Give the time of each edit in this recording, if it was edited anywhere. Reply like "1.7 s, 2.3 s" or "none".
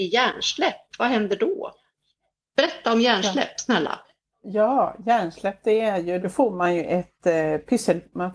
6.2 s